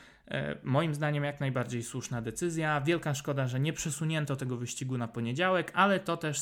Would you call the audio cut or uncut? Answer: uncut